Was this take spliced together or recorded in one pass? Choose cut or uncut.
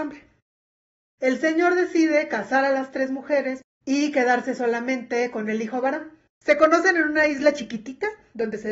cut